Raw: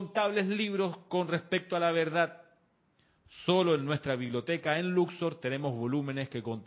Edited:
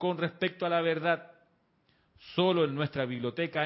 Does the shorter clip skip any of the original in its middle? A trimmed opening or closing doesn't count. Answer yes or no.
no